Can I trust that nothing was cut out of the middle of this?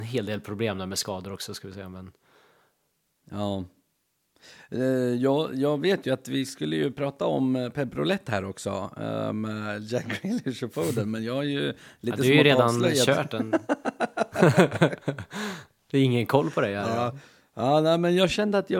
yes; 0 cuts

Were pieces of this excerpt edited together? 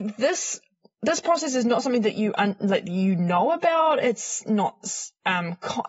no; 0 cuts

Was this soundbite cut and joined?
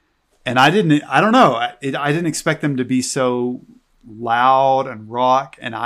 no; 0 cuts

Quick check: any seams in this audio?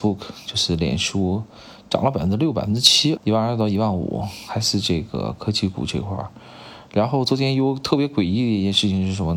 yes; 1 cut; at 3.2 s

